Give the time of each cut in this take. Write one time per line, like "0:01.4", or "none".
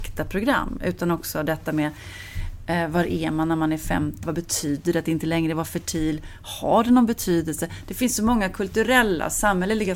0:04.2